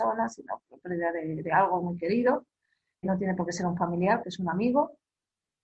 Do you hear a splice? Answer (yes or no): yes